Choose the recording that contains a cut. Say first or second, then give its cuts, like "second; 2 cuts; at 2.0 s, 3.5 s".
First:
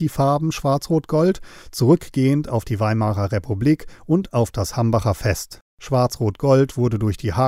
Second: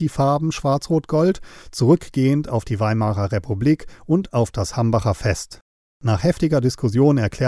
first; 1 cut; at 5.7 s